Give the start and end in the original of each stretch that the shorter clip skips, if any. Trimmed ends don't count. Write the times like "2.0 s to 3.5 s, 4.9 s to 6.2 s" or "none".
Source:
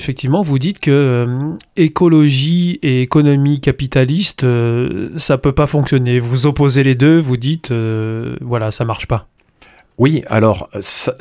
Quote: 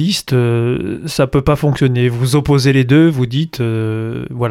none